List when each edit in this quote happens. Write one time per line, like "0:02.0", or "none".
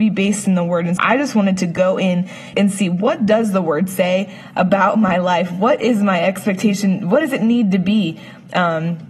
0:01.0
0:02.5

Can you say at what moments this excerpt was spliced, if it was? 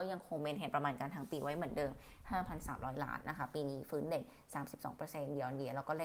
0:03.2

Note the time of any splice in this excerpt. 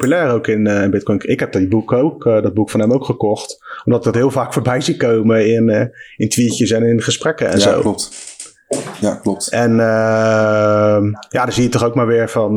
none

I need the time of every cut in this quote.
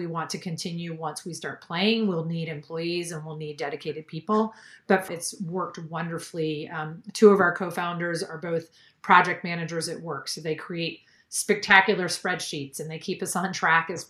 0:05.1

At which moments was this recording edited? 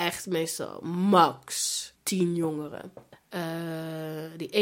0:03.1

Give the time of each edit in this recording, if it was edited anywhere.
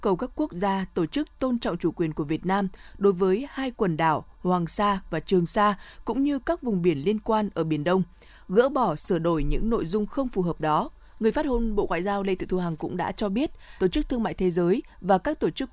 0:11.1
0:13.8

